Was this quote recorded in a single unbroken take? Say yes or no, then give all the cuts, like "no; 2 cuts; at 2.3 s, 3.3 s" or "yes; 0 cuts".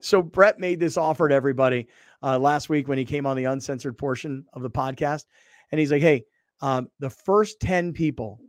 yes; 0 cuts